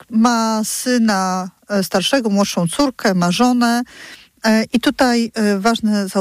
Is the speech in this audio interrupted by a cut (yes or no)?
yes